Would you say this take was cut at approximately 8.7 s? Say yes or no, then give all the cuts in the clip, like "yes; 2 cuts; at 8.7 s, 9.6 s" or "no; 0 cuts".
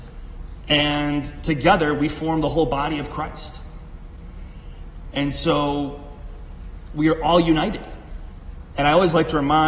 yes; 1 cut; at 8.7 s